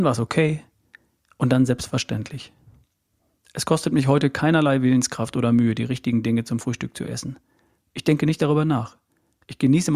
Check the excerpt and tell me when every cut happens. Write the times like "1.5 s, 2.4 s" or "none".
none